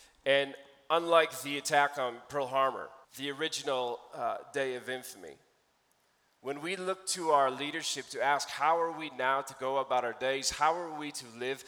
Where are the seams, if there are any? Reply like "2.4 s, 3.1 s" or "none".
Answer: 3.0 s

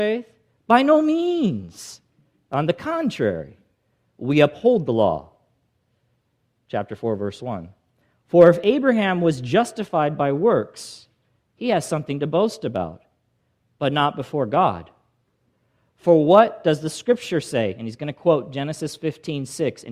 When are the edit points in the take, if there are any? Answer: 8.2 s

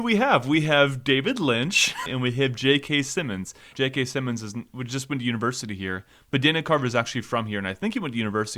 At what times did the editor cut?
2.1 s, 3.7 s

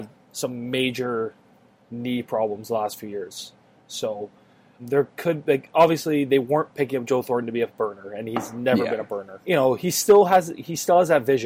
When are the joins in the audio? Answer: 4.8 s

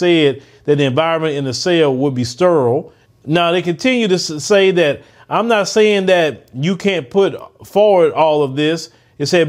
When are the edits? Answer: 3.0 s

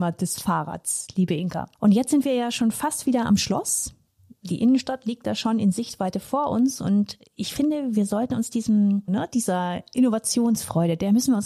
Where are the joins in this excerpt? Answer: 9.1 s

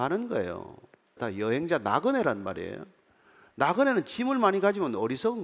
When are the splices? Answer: 1.2 s

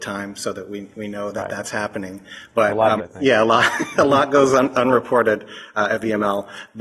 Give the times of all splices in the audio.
3.0 s

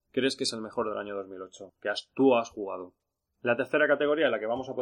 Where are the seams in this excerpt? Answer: 3.3 s

